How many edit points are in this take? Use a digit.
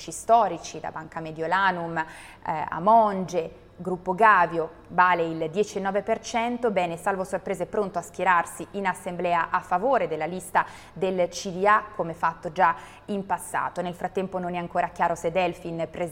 0